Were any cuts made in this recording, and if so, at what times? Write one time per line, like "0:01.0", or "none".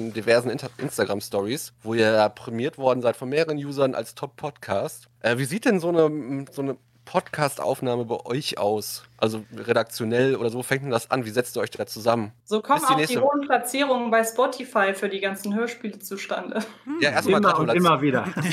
0:12.4